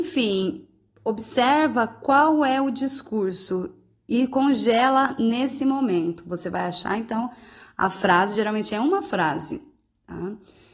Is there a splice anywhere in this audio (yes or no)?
no